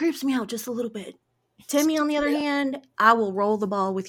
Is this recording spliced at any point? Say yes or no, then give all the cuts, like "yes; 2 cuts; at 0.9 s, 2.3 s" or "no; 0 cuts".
no; 0 cuts